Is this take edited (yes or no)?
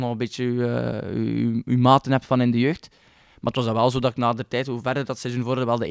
no